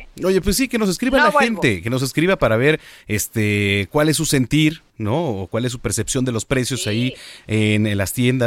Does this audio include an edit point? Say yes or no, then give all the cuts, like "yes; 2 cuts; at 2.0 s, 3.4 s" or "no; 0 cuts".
no; 0 cuts